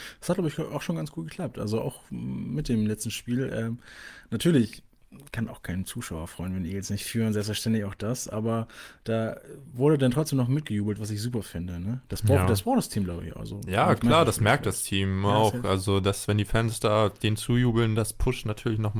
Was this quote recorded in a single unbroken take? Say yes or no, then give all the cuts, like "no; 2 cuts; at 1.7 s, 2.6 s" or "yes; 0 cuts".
yes; 0 cuts